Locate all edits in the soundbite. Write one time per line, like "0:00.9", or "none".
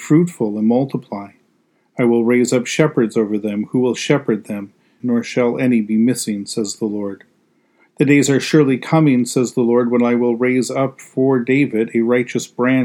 0:05.0